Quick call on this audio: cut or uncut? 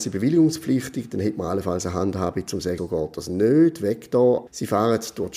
cut